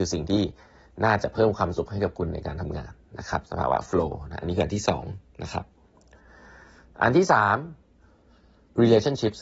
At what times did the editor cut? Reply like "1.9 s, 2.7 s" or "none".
none